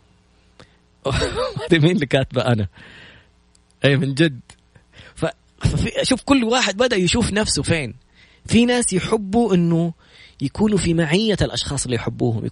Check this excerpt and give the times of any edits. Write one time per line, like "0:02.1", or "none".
none